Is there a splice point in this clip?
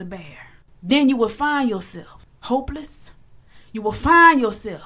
yes; 1 cut; at 3.7 s

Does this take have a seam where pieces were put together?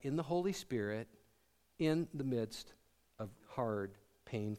yes; 1 cut; at 3.4 s

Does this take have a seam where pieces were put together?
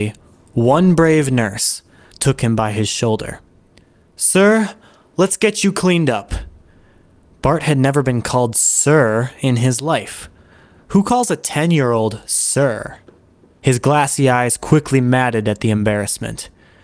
yes; 2 cuts; at 2.1 s, 13.6 s

